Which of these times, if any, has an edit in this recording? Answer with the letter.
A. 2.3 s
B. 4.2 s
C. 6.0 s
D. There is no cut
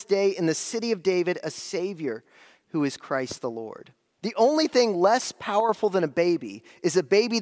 B